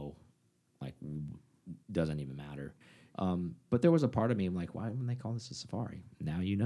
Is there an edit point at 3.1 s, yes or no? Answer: yes